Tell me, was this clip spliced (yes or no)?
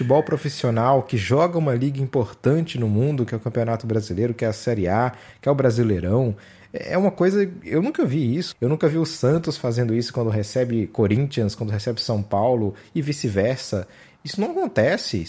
yes